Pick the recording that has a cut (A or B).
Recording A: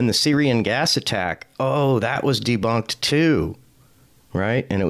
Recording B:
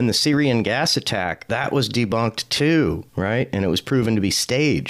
B